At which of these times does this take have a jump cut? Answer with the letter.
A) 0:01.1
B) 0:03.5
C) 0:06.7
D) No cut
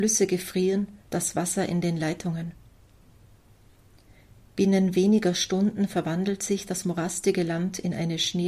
A